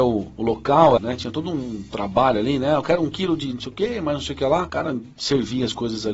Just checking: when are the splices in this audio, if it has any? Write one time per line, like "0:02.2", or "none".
0:01.0